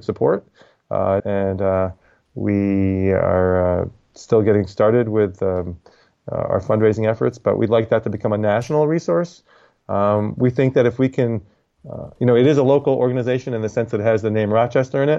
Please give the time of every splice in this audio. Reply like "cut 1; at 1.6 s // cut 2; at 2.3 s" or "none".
cut 1; at 1.2 s